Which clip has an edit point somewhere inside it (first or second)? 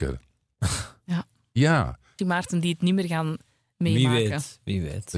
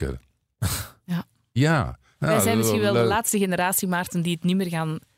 first